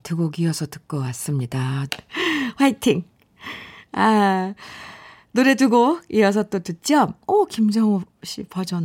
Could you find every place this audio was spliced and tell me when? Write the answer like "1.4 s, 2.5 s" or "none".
1.9 s, 7.2 s

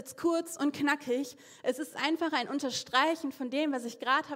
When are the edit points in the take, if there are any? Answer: none

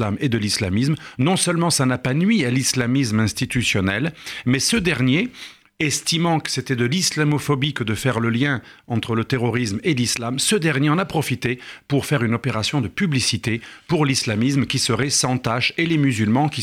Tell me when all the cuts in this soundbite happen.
none

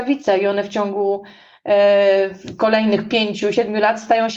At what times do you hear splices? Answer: none

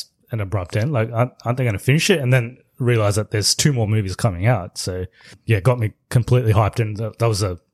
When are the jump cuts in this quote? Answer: none

